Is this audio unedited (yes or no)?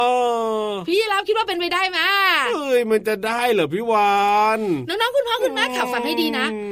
yes